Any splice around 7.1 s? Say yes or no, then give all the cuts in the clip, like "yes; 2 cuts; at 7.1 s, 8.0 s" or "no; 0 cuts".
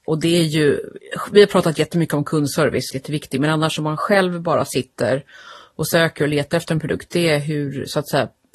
no; 1 cut; at 2.9 s